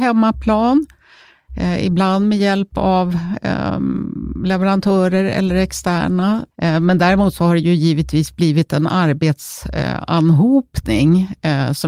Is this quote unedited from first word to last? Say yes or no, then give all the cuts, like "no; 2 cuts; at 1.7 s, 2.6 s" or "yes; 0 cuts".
no; 1 cut; at 6.5 s